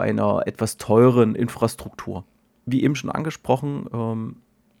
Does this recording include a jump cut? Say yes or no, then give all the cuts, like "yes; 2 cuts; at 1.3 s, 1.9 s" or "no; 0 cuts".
no; 0 cuts